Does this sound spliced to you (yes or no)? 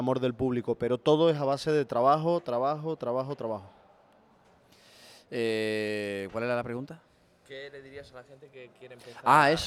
no